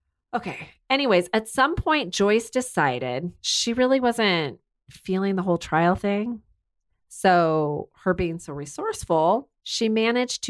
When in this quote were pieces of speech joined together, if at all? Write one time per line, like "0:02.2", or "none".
none